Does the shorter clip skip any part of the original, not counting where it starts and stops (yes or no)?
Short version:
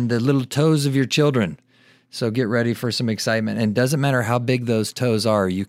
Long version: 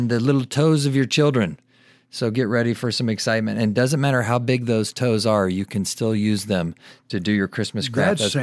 no